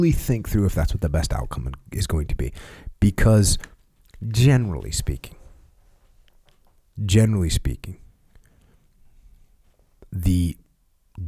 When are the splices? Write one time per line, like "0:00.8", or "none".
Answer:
none